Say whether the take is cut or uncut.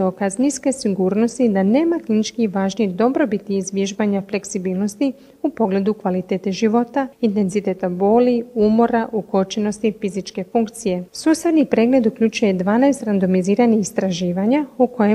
cut